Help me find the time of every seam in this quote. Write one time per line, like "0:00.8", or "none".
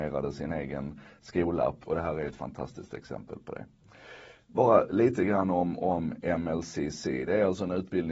0:01.8

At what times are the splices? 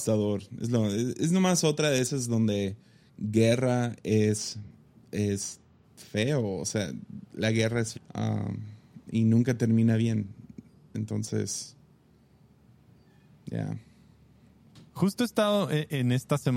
0:07.9

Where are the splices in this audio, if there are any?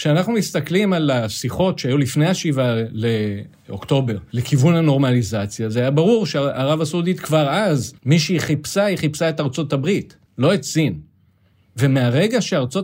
0:08.0
0:10.3

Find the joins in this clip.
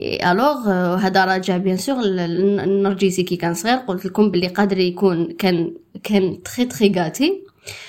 none

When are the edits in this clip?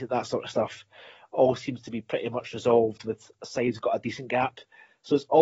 none

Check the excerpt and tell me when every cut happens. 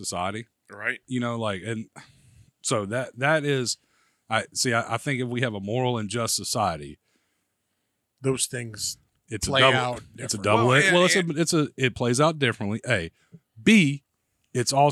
0:01.0

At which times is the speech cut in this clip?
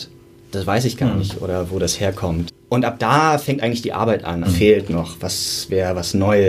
0:02.5
0:04.4

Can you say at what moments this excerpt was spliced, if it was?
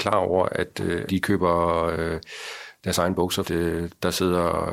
0:01.1
0:03.4

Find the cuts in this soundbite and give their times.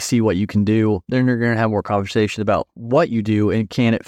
none

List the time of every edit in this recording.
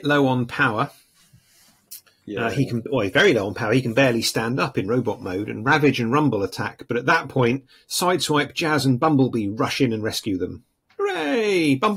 none

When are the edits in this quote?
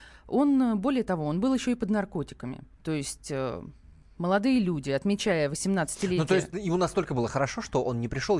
0:02.7

